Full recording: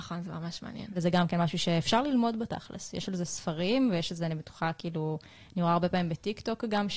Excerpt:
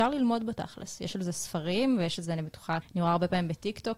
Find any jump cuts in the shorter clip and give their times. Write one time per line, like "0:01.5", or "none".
0:02.8